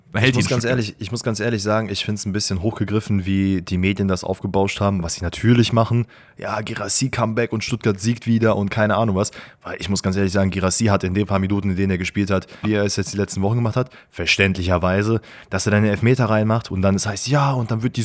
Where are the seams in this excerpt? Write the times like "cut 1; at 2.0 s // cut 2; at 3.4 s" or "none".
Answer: cut 1; at 12.6 s